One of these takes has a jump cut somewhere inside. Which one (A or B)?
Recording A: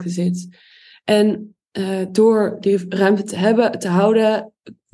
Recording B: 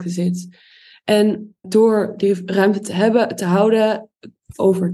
B